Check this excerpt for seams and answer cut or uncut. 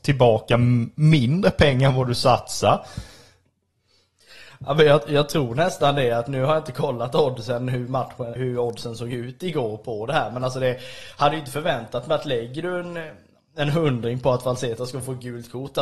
cut